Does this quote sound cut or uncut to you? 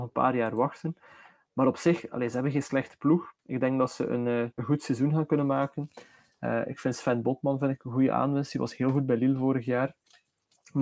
cut